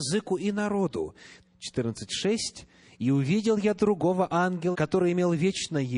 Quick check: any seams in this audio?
yes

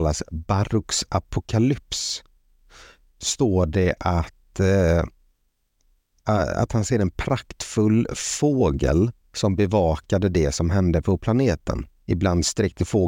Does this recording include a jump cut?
no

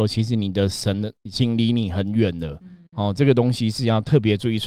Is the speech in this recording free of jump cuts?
yes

